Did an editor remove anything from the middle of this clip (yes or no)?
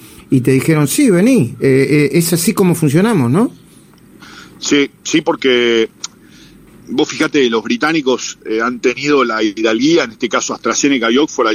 no